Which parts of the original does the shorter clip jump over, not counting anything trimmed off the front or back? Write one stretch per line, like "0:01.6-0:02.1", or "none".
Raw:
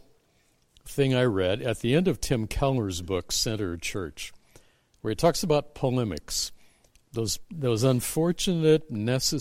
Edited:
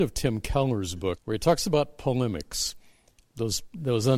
0:03.2-0:04.9